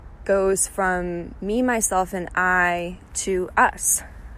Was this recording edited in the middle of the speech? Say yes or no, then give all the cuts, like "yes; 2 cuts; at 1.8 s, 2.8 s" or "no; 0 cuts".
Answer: no; 0 cuts